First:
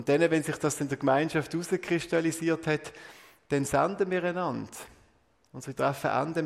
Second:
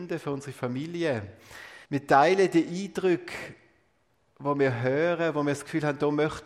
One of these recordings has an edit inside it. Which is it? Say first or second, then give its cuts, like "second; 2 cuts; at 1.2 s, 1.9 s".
second; 1 cut; at 1.8 s